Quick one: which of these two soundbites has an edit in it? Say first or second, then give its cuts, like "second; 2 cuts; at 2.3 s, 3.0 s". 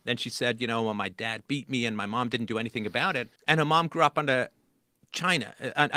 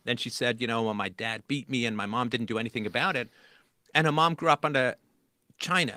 first; 1 cut; at 3.4 s